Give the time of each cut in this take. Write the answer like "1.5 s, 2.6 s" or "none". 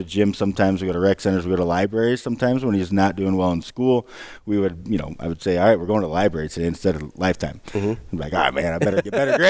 none